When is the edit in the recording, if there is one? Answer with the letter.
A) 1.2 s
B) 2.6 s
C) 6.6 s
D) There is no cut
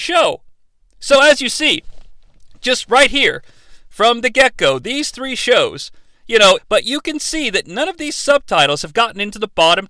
C